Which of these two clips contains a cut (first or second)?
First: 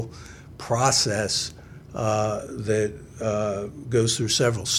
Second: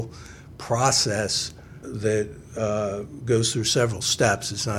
second